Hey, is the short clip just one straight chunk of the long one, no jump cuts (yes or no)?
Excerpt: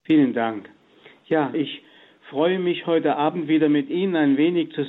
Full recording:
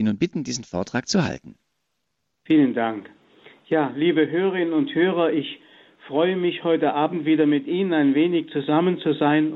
no